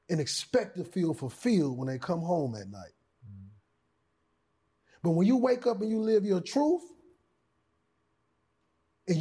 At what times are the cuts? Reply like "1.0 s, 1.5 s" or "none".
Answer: none